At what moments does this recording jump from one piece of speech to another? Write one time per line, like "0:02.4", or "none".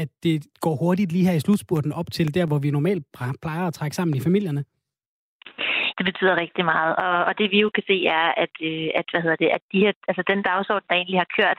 0:05.9